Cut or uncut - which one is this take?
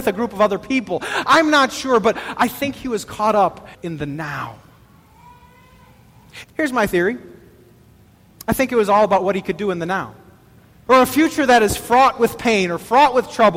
cut